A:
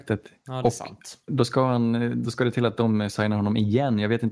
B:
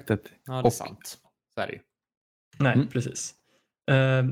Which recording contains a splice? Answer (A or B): B